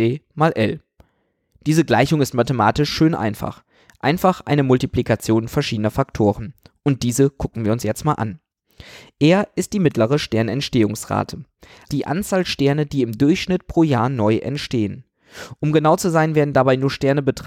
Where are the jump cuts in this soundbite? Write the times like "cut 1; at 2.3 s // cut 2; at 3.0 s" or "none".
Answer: cut 1; at 11.9 s